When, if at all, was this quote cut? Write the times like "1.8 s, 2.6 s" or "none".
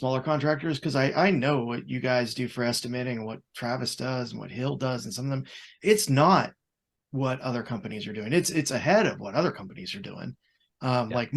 none